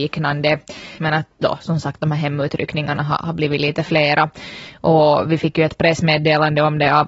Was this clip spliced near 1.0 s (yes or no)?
yes